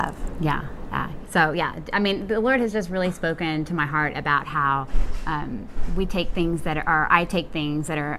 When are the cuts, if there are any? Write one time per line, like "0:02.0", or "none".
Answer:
0:01.3